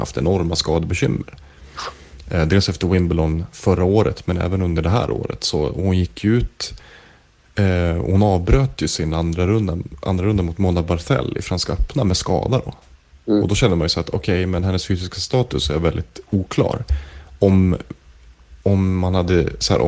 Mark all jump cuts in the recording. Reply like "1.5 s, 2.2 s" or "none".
none